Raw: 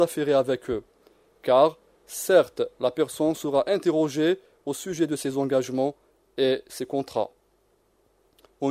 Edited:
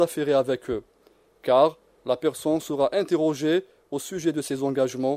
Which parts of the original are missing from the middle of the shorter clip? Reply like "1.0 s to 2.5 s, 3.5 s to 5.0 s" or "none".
2.0 s to 2.7 s